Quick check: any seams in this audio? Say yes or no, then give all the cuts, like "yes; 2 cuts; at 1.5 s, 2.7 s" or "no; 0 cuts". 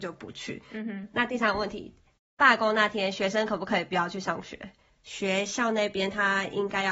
yes; 1 cut; at 4.9 s